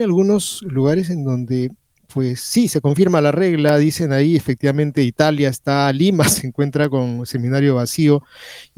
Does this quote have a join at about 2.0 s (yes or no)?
no